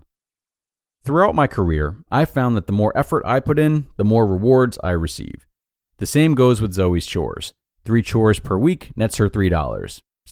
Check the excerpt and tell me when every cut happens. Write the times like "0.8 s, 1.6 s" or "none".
7.7 s